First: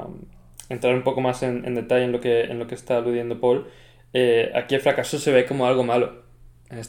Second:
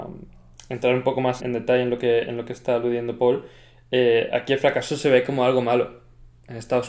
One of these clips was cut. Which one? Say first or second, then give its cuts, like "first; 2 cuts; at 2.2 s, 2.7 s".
second; 1 cut; at 1.4 s